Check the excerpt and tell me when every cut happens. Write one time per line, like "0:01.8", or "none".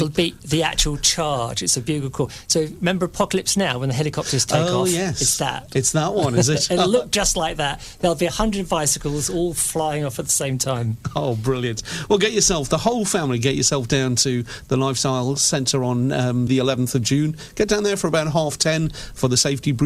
0:16.5